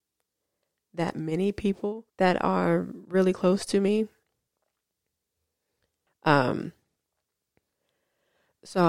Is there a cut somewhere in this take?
yes; 2 cuts; at 2.1 s, 6.1 s

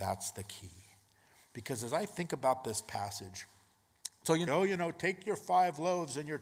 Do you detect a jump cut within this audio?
yes; 1 cut; at 4.5 s

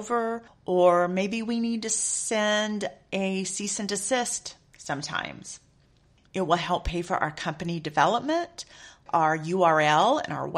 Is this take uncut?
no; 1 cut; at 9.1 s

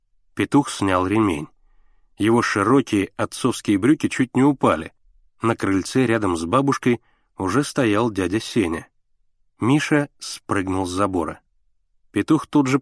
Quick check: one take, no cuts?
no; 1 cut; at 5.3 s

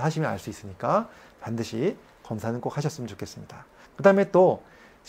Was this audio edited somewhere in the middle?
yes; 1 cut; at 3.8 s

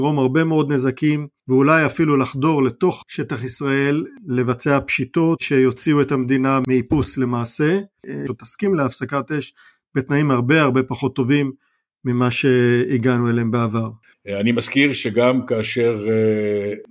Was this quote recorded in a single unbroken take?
no; 2 cuts; at 8.3 s, 14.1 s

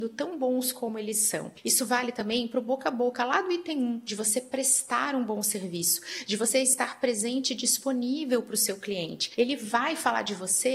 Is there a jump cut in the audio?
no; 0 cuts

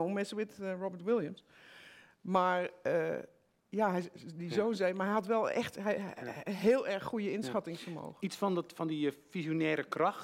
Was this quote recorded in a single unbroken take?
yes; 0 cuts

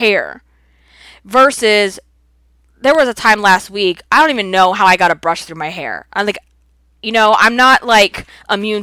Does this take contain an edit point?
no; 0 cuts

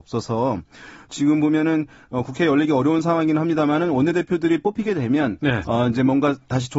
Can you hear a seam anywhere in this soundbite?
yes; 1 cut; at 5.7 s

